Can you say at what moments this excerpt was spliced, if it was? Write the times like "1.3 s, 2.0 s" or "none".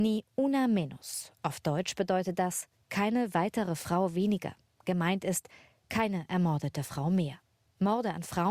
none